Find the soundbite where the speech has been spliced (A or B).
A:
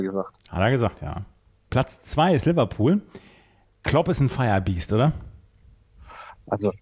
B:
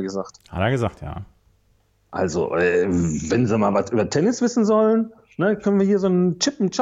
A